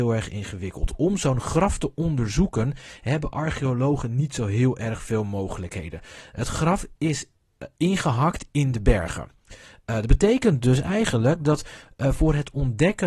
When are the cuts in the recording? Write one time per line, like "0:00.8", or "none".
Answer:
none

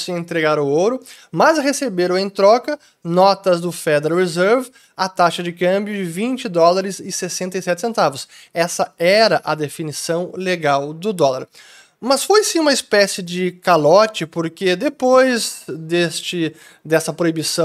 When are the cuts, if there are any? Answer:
none

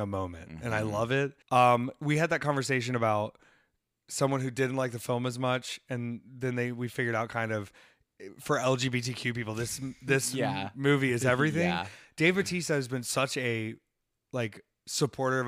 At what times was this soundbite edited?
0:01.4

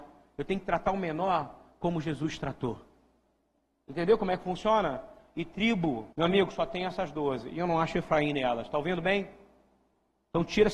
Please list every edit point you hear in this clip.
0:06.1

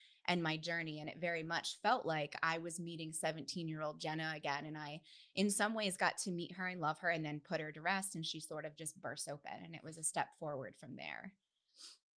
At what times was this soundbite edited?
none

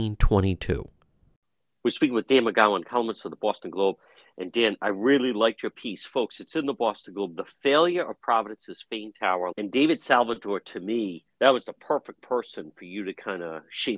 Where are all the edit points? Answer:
0:09.5
0:11.3

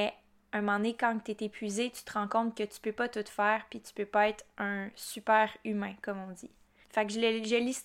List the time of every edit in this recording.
0:06.8

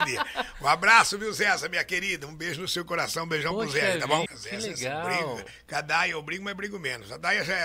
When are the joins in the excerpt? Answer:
0:04.3

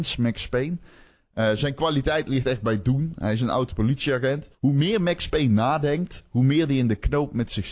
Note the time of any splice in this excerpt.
0:04.5

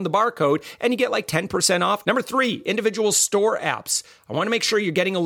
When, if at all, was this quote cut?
0:02.0

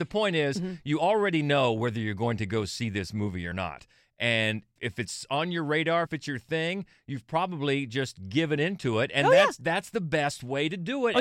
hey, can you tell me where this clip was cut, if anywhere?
none

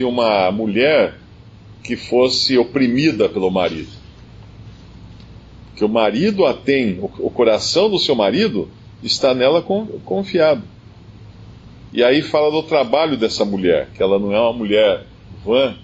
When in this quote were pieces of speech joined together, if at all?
0:11.9

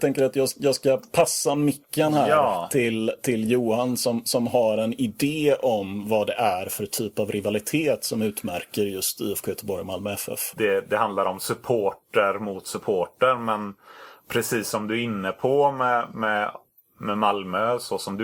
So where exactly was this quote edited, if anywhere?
0:10.5

